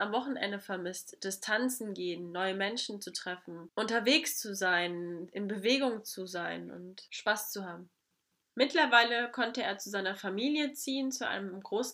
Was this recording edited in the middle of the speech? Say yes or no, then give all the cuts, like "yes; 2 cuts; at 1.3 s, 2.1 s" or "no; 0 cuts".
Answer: no; 0 cuts